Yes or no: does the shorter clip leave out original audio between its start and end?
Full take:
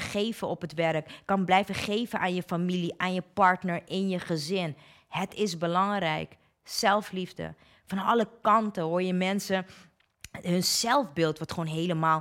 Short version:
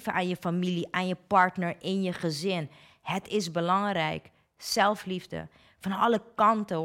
no